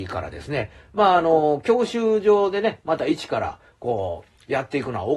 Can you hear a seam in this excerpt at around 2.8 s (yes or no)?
no